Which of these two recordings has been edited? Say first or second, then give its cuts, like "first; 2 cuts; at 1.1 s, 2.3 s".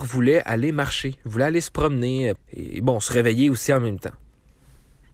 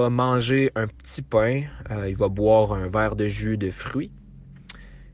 first; 1 cut; at 2.4 s